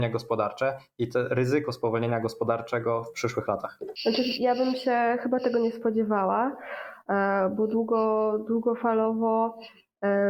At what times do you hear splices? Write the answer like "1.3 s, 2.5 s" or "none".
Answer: none